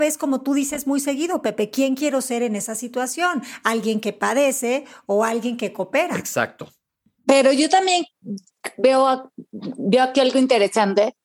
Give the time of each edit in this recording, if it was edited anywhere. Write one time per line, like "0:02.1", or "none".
0:07.2